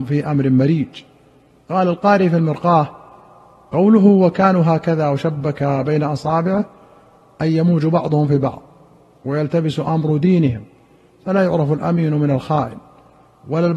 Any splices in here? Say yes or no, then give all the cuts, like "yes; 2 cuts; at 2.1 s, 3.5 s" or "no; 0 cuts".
no; 0 cuts